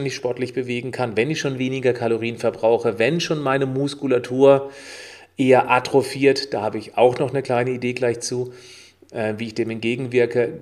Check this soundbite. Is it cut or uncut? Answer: uncut